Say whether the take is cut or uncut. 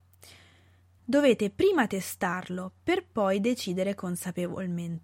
cut